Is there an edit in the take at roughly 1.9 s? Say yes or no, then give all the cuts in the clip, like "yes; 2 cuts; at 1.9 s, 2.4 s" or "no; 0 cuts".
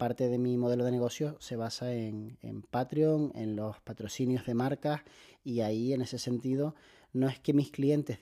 no; 0 cuts